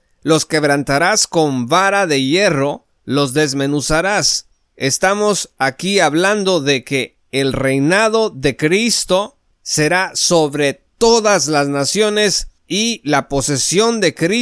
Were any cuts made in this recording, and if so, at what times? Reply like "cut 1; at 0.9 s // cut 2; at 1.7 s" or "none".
cut 1; at 3.0 s // cut 2; at 12.6 s